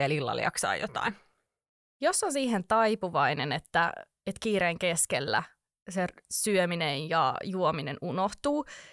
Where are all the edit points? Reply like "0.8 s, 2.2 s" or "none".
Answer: none